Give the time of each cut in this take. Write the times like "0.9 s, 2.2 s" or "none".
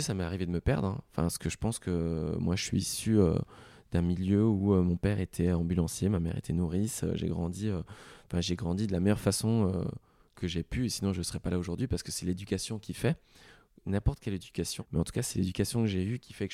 14.8 s